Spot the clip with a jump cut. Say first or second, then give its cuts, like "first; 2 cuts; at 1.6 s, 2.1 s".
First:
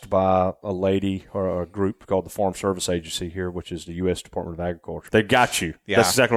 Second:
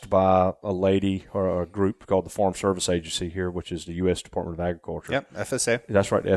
first; 1 cut; at 5.1 s